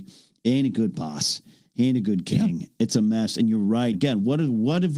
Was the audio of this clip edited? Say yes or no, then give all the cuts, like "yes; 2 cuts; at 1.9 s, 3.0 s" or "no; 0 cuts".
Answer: yes; 1 cut; at 3.9 s